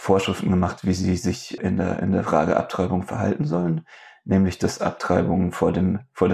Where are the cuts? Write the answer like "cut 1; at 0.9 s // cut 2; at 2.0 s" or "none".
cut 1; at 1.6 s